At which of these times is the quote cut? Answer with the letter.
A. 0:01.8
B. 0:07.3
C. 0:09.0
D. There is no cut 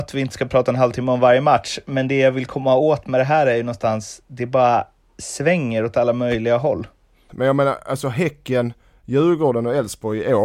B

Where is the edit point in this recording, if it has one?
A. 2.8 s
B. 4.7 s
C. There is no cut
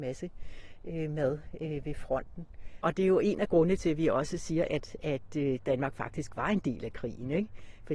A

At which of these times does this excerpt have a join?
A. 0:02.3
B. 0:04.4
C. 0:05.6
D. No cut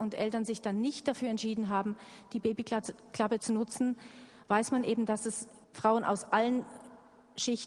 C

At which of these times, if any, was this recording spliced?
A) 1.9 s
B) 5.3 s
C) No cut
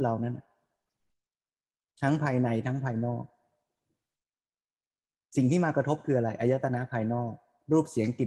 C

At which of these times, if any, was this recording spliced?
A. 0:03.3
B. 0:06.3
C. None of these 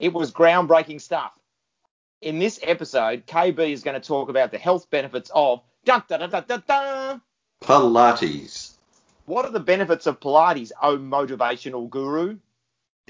B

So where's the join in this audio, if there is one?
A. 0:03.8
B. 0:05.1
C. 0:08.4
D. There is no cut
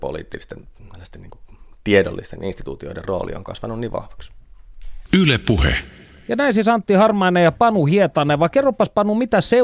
D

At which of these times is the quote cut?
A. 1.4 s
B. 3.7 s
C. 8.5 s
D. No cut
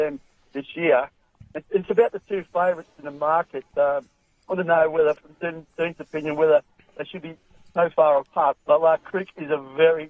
C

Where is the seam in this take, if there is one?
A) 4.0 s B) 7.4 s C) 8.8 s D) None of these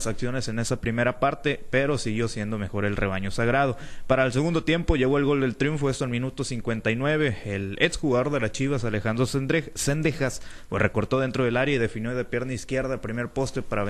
D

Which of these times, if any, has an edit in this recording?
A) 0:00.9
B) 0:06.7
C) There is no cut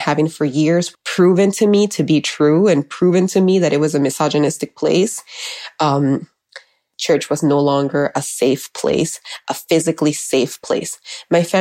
A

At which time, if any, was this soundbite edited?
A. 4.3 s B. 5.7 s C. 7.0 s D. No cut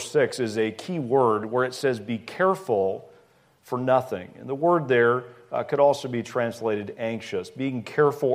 D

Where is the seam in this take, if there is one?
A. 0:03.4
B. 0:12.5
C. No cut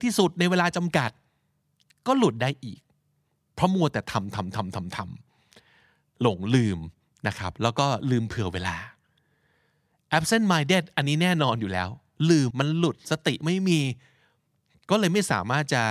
B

